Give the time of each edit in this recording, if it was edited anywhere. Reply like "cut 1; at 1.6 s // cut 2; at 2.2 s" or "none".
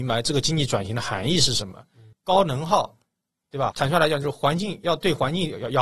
cut 1; at 2.1 s // cut 2; at 3.7 s